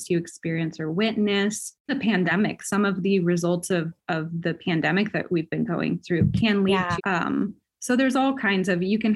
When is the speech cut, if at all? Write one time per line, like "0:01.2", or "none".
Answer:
0:01.9
0:07.0

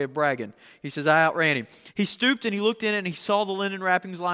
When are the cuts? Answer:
0:01.9

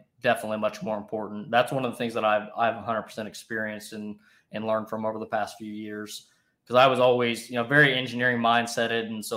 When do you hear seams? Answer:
none

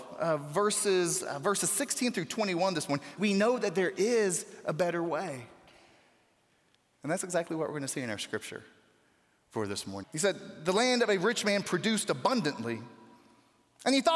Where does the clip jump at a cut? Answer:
0:03.2
0:10.0

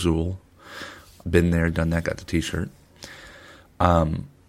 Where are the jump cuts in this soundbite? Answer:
0:01.2

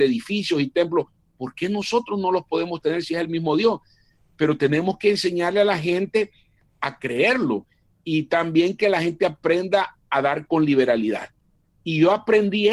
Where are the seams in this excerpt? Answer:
0:11.6

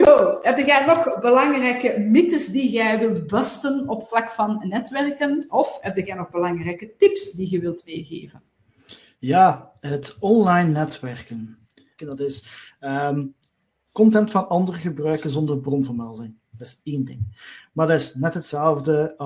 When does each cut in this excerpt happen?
0:12.0

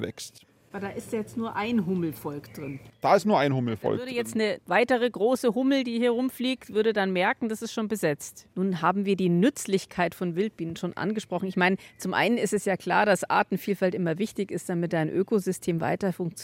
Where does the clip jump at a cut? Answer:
0:08.5

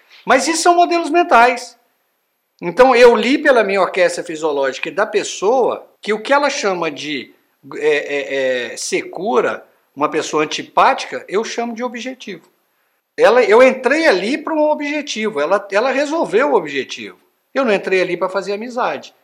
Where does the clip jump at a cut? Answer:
0:06.0
0:13.0

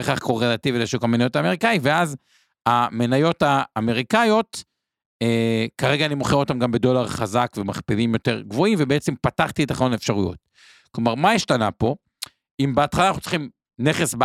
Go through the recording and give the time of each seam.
none

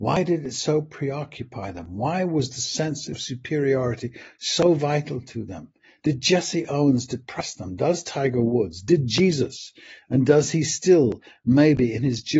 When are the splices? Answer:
none

